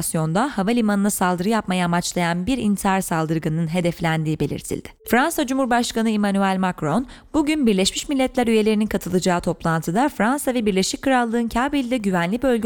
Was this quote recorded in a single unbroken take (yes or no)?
no